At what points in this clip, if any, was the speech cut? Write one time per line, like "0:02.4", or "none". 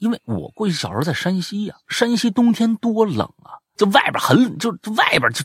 0:03.7